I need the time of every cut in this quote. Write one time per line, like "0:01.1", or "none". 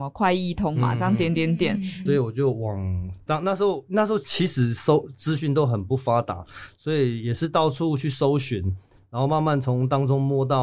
0:02.1